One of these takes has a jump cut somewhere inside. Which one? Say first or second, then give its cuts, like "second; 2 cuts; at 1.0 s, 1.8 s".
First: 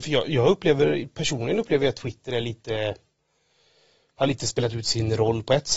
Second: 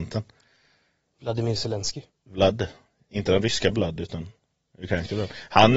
second; 1 cut; at 2.1 s